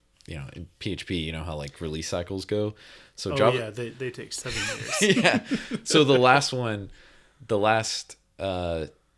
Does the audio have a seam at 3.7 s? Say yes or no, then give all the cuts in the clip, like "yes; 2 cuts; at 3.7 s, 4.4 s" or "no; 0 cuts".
no; 0 cuts